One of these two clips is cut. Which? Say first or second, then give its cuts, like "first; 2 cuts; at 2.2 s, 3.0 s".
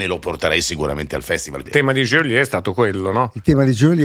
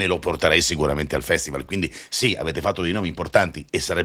first; 1 cut; at 1.7 s